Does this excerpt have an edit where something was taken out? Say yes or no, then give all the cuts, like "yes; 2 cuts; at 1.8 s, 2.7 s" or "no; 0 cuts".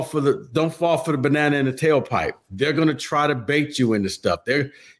no; 0 cuts